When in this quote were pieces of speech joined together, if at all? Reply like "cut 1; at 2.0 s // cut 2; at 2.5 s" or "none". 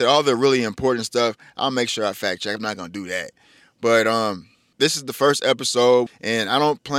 cut 1; at 2.6 s // cut 2; at 4.7 s // cut 3; at 6.1 s